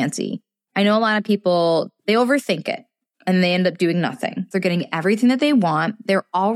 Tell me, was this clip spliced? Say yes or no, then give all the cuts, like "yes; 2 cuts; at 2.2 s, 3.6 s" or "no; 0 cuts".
yes; 1 cut; at 4.5 s